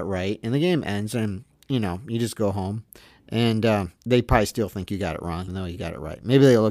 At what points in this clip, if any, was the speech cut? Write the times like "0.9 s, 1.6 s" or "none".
4.0 s, 5.5 s